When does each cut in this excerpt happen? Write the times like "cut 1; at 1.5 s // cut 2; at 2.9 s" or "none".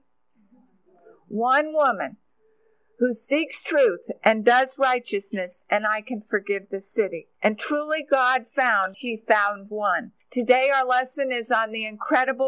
cut 1; at 7.3 s // cut 2; at 8.9 s // cut 3; at 10.2 s